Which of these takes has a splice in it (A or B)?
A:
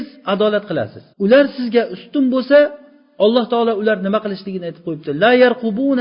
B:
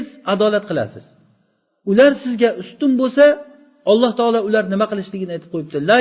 A